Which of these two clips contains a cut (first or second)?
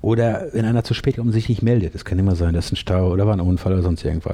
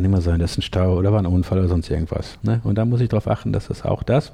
second